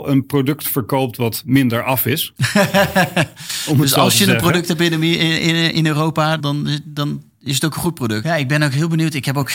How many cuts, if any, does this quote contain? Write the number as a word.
two